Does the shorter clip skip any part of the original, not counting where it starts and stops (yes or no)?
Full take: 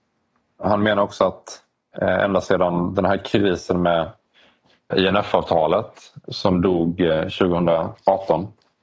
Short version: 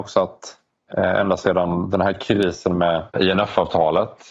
yes